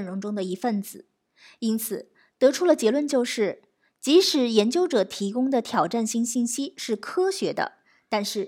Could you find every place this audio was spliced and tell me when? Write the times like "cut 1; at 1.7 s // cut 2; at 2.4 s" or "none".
none